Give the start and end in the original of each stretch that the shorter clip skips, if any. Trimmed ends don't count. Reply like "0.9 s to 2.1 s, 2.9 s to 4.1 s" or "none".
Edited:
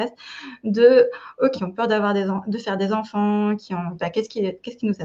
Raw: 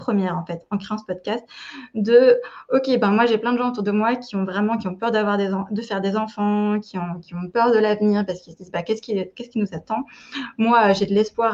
2.9 s to 4.8 s, 7.2 s to 8.7 s